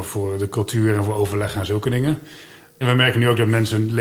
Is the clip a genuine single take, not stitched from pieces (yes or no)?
no